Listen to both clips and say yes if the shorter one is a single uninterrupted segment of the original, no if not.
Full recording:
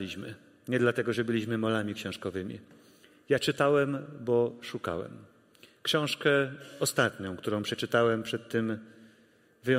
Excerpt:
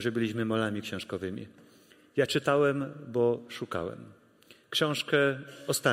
yes